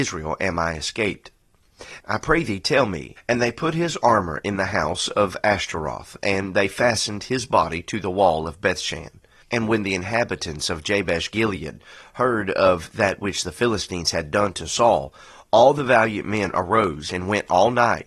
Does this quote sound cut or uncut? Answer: cut